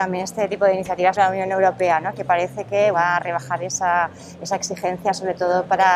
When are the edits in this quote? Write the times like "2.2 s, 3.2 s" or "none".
1.2 s, 2.9 s